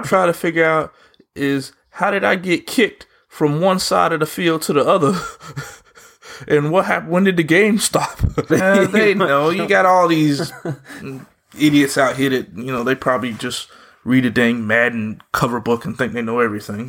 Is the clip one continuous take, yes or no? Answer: no